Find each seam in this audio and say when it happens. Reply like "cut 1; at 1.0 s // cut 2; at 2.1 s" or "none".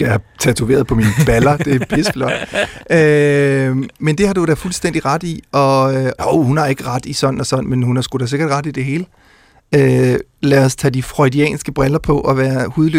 cut 1; at 6.2 s

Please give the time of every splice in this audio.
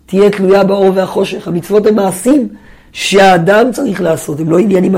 none

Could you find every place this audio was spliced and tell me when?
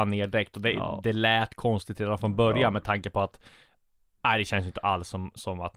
none

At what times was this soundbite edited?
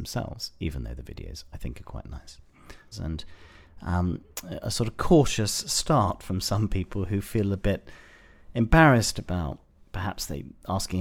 cut 1; at 2.9 s // cut 2; at 4.6 s

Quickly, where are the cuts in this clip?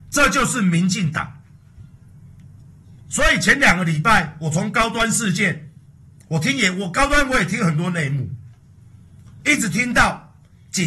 none

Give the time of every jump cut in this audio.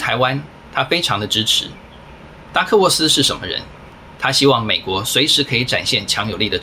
cut 1; at 2.5 s // cut 2; at 4.2 s

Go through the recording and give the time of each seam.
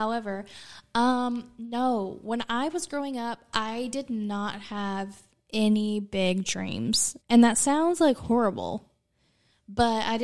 cut 1; at 7.2 s

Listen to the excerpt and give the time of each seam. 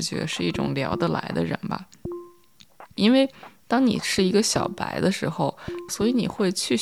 cut 1; at 3.0 s // cut 2; at 5.9 s

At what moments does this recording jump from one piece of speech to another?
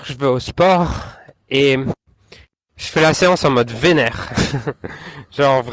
none

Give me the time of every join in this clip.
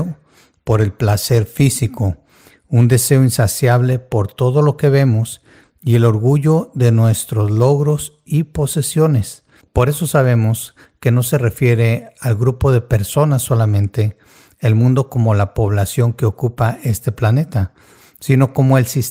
cut 1; at 9.6 s

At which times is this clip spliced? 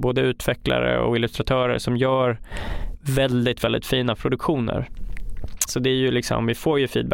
cut 1; at 5.7 s

